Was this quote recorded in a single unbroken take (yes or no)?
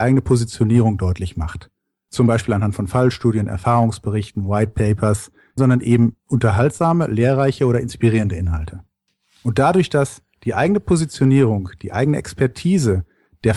no